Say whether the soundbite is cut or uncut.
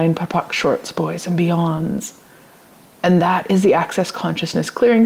uncut